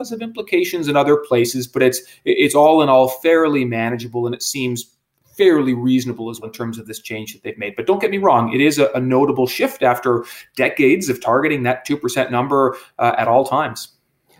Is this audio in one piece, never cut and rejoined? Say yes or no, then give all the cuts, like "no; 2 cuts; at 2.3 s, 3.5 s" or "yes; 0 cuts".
no; 1 cut; at 6.4 s